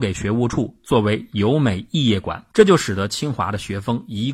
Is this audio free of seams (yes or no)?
no